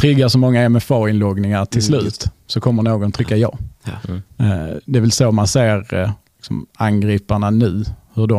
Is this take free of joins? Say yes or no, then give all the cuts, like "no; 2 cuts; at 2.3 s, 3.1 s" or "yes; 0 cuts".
yes; 0 cuts